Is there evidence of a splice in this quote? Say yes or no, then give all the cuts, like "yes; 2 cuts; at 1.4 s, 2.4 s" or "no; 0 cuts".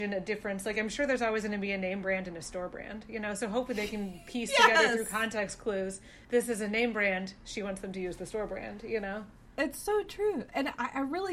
no; 0 cuts